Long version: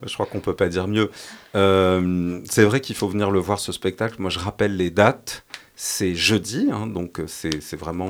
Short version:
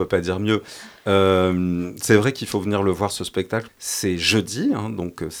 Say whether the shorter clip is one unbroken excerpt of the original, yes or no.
no